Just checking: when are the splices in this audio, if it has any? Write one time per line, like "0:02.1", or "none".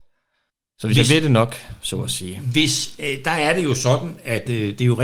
none